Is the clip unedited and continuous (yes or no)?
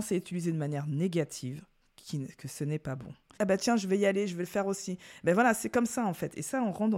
no